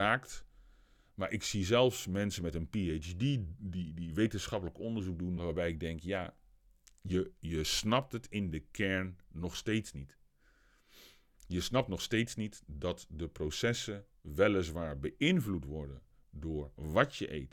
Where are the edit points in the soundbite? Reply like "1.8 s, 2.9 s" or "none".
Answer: 5.4 s